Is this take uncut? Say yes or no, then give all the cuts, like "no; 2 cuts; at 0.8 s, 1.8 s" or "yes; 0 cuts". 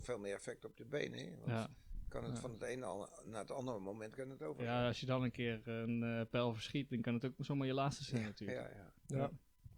yes; 0 cuts